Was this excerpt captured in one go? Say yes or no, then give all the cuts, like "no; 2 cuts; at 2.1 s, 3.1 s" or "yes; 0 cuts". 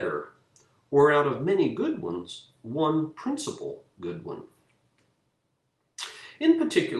yes; 0 cuts